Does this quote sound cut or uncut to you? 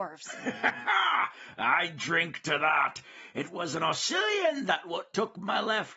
uncut